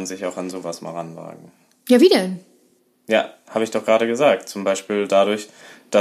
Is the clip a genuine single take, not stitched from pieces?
yes; 0 cuts

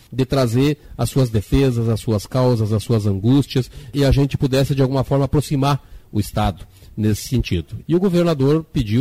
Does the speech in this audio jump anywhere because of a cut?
yes; 1 cut; at 7.8 s

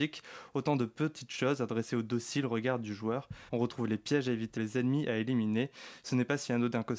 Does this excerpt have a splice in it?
yes; 2 cuts; at 3.5 s, 4.6 s

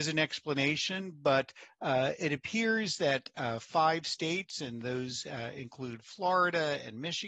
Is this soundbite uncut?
yes; 0 cuts

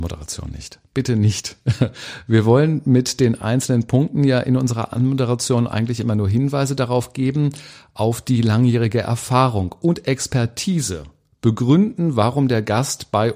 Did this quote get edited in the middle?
no; 0 cuts

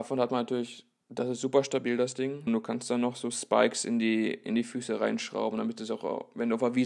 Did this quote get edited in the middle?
yes; 1 cut; at 2.5 s

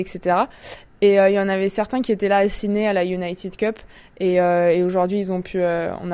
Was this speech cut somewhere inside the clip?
no; 0 cuts

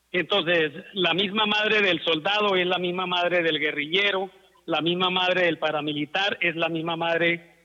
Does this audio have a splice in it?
no; 0 cuts

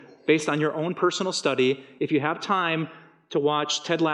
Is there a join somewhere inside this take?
no; 0 cuts

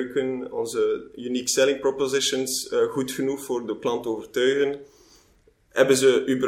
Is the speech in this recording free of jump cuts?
yes; 0 cuts

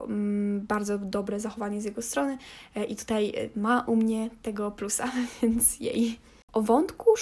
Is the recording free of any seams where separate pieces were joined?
yes; 0 cuts

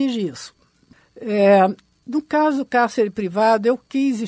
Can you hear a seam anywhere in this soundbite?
no; 0 cuts

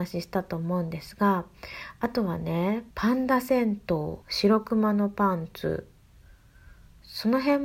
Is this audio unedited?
no; 2 cuts; at 2.9 s, 4.2 s

